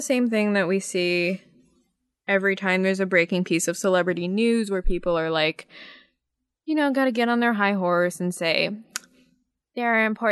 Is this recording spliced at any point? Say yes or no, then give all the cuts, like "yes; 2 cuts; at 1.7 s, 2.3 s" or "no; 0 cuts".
no; 0 cuts